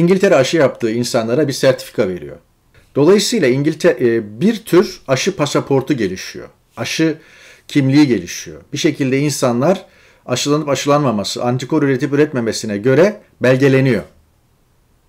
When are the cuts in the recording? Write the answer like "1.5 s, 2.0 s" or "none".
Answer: 2.7 s